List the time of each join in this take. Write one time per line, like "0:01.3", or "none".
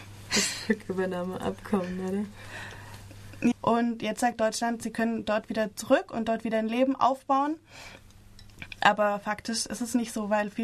0:03.5